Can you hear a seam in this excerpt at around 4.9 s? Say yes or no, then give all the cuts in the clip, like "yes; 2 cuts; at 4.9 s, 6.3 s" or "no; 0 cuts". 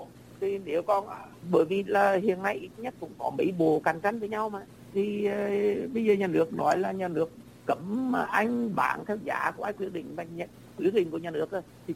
yes; 1 cut; at 4.9 s